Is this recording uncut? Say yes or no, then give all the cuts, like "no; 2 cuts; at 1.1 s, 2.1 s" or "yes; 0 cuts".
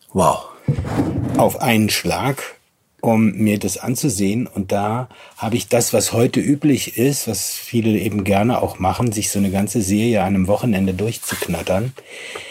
yes; 0 cuts